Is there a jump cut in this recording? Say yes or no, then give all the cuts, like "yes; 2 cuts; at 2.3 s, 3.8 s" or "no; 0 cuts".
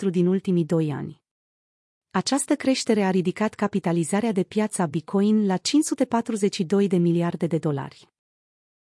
no; 0 cuts